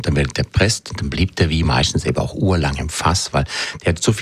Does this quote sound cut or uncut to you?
uncut